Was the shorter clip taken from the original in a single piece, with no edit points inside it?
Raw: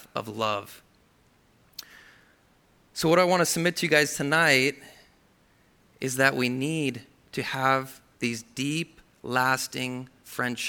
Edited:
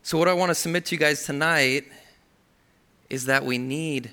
yes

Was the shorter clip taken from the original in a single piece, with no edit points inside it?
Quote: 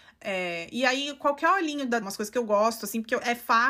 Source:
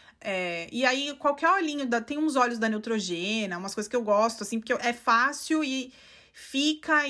no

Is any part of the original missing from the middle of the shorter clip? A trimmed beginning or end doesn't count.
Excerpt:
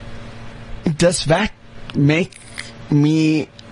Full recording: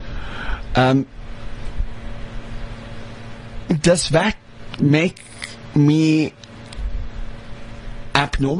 no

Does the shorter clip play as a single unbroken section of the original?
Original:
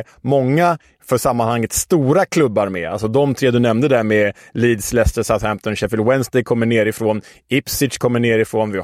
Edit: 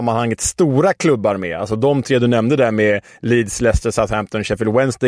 yes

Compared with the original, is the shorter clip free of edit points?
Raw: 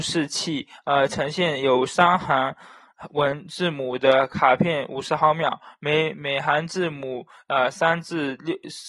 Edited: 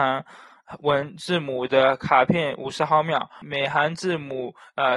no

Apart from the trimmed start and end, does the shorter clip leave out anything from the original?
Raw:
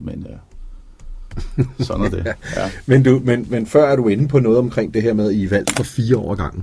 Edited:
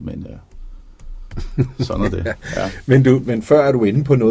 yes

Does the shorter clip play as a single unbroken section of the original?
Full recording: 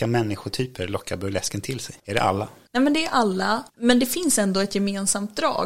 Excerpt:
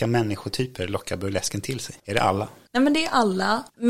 yes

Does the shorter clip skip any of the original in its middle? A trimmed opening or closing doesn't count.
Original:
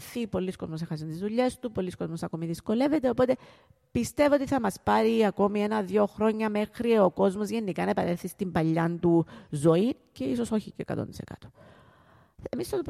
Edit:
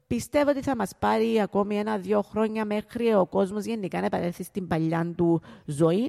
no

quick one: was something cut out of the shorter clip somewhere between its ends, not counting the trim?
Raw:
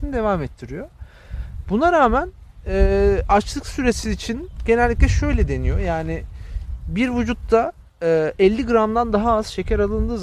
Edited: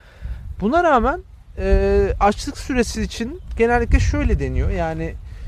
no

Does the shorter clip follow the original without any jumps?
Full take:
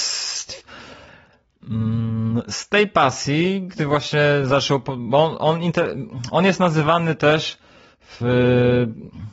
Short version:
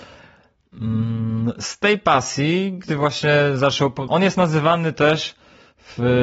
no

